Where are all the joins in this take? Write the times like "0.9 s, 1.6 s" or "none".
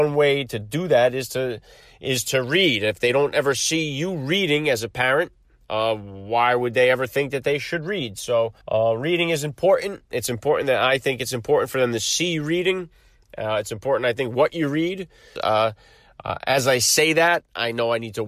8.6 s, 15.4 s